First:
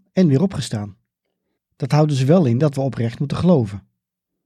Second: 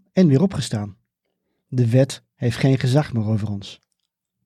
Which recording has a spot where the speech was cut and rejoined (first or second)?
first